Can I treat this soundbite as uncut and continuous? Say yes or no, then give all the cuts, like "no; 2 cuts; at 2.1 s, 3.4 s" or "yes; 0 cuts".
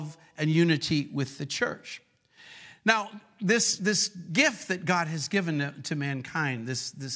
yes; 0 cuts